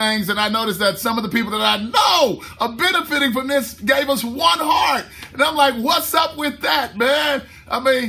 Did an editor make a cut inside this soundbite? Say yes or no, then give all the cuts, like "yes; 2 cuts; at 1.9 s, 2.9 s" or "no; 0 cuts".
no; 0 cuts